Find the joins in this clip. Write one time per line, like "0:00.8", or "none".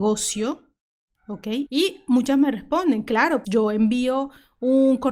0:01.7
0:03.4